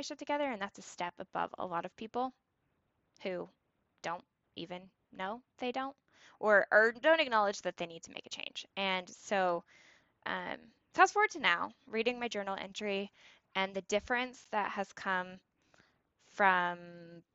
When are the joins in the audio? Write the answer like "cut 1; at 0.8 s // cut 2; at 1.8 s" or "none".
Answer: none